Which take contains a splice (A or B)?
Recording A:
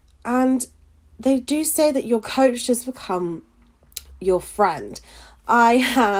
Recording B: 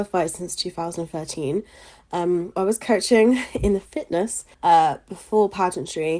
B